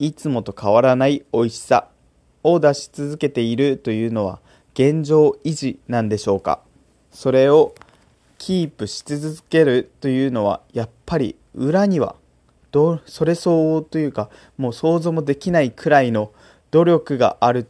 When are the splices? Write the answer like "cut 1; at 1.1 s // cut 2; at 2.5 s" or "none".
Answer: cut 1; at 7.1 s